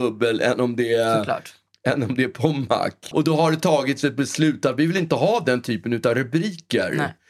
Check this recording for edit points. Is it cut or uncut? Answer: cut